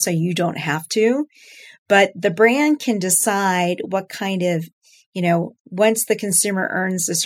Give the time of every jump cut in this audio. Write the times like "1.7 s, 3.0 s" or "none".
none